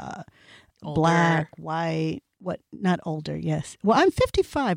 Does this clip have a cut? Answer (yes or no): no